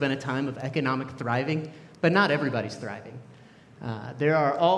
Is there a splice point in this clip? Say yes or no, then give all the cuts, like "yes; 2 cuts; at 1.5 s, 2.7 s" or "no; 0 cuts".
no; 0 cuts